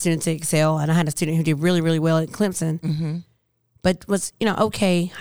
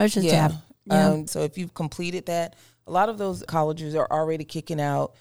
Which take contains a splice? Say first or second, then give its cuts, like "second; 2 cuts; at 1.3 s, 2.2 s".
second; 2 cuts; at 1.3 s, 3.5 s